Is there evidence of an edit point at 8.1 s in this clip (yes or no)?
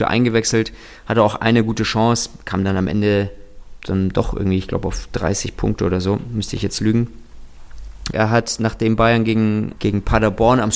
yes